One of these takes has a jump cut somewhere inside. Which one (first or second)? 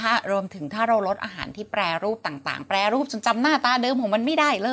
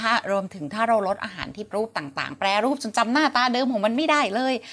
second